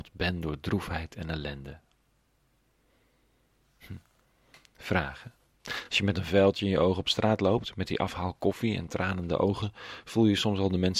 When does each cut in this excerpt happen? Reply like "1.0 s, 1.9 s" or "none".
none